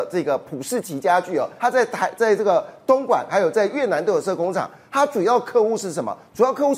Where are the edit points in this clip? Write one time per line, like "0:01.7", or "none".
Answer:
0:01.6